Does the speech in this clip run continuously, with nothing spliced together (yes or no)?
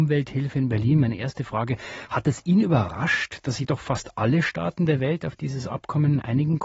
yes